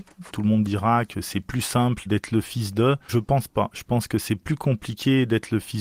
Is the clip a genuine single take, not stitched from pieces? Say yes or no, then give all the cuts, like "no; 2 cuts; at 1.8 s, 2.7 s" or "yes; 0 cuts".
yes; 0 cuts